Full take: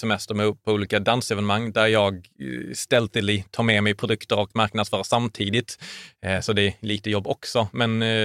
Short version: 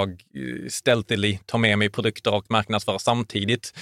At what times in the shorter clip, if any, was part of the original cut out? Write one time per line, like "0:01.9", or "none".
none